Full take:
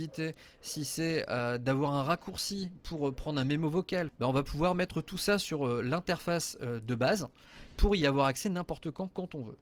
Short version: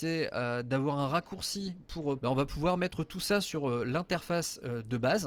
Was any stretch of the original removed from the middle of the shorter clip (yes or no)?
yes